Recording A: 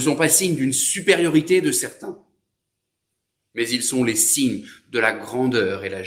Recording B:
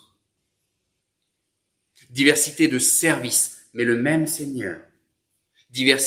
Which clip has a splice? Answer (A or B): B